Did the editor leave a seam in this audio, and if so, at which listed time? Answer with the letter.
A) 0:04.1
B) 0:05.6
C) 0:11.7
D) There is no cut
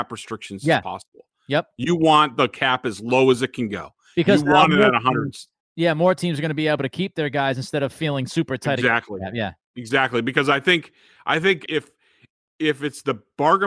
C